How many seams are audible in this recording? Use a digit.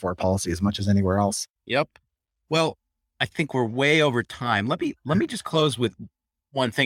1